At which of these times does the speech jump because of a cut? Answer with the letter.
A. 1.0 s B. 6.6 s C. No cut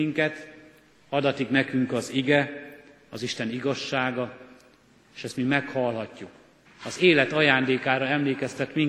B